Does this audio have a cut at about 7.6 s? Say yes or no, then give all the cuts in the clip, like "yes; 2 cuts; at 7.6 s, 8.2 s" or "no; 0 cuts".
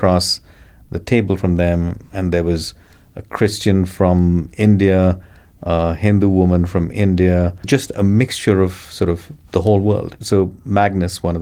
yes; 2 cuts; at 7.6 s, 10.2 s